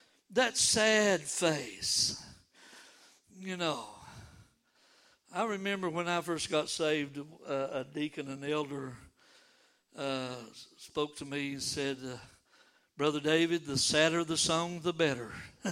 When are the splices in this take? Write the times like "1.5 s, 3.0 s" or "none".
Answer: none